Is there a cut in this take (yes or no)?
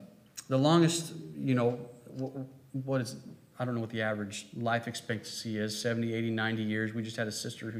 no